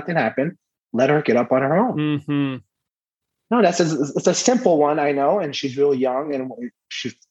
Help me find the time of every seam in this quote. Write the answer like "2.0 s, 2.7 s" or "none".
none